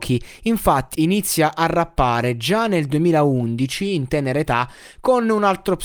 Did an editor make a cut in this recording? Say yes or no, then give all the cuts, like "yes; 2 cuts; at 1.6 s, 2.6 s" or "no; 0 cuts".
yes; 1 cut; at 0.9 s